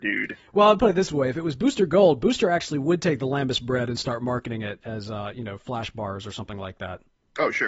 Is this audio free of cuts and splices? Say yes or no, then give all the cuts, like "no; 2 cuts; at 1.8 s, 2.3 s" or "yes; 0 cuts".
yes; 0 cuts